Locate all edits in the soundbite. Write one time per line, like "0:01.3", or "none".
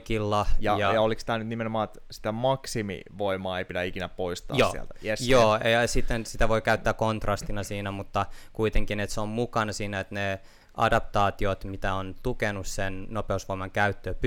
none